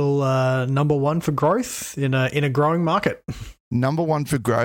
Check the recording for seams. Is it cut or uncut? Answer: cut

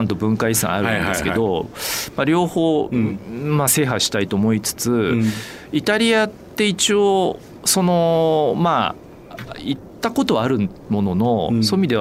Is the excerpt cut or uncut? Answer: uncut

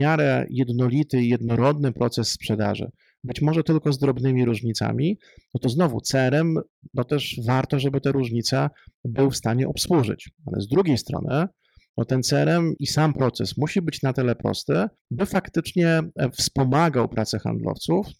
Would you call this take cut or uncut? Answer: cut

